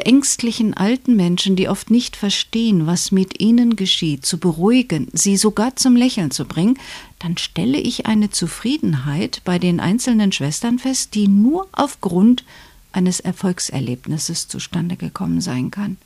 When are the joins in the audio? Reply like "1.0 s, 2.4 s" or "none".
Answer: none